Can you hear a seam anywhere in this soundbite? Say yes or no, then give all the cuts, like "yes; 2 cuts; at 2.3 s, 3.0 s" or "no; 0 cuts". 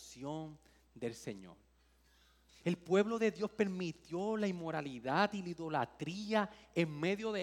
no; 0 cuts